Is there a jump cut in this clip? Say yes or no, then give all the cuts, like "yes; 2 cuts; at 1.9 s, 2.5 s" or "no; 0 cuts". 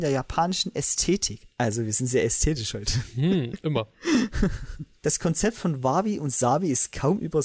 no; 0 cuts